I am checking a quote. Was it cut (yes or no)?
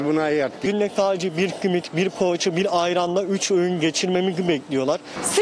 no